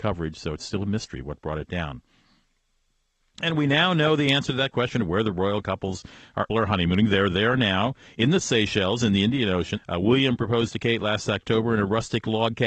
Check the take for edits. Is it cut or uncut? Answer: cut